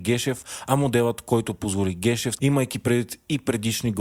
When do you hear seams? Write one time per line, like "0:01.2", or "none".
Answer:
0:02.4